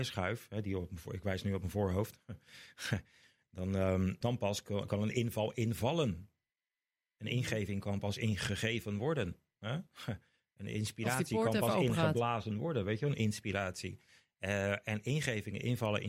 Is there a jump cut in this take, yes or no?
yes